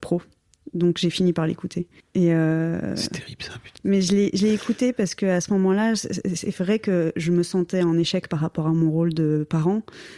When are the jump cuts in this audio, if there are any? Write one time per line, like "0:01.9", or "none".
0:02.0
0:03.8